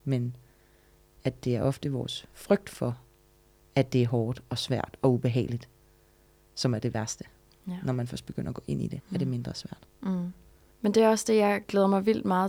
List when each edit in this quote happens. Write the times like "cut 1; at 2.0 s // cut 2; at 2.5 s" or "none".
cut 1; at 9.0 s // cut 2; at 10.7 s

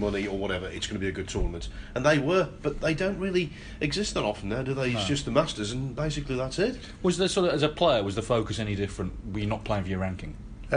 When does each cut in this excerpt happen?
none

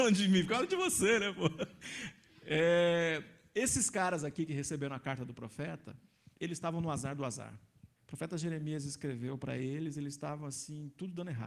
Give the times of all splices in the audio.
cut 1; at 8.0 s

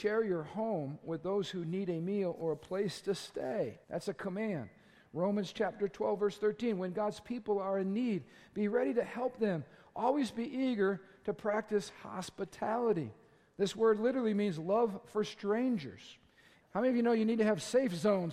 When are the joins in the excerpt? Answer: cut 1; at 3.8 s // cut 2; at 16.6 s

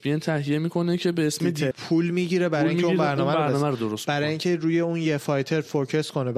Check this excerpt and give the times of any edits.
cut 1; at 1.7 s

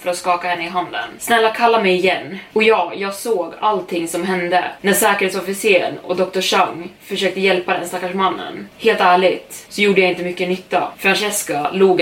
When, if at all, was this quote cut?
none

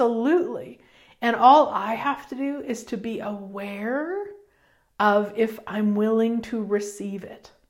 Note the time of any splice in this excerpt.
none

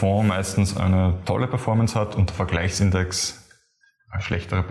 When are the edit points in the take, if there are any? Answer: none

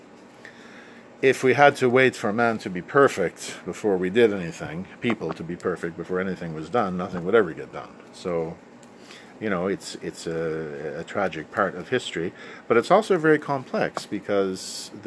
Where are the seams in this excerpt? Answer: none

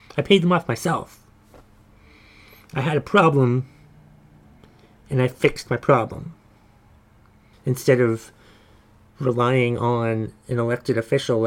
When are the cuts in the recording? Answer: cut 1; at 7.5 s

